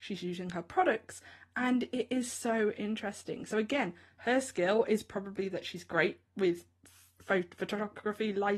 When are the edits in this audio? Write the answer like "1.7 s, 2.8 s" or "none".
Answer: none